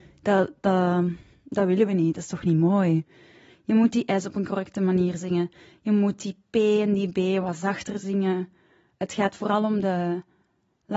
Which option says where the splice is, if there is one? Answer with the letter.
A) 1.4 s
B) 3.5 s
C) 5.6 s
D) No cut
B